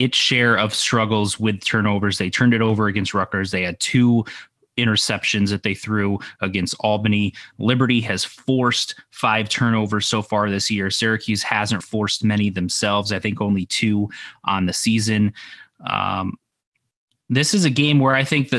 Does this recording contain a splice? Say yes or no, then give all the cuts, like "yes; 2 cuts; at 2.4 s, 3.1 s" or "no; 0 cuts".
yes; 1 cut; at 11.8 s